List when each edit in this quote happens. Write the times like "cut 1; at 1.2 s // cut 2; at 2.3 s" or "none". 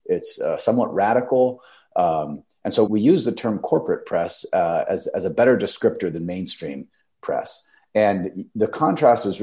cut 1; at 2.9 s